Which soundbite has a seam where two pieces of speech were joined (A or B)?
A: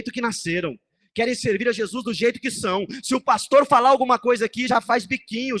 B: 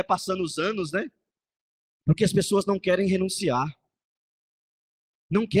B